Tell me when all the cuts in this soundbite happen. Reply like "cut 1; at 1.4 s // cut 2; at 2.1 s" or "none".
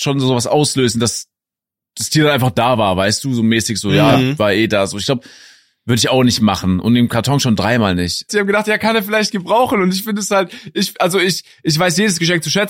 cut 1; at 8.3 s